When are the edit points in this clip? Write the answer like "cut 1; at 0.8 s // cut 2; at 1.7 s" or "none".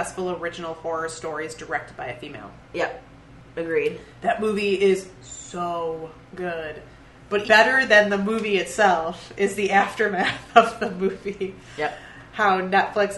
cut 1; at 7.4 s